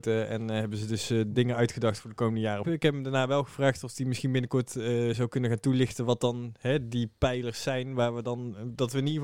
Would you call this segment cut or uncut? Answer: cut